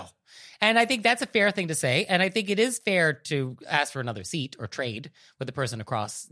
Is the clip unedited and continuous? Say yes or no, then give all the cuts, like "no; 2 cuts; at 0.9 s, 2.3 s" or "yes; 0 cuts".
yes; 0 cuts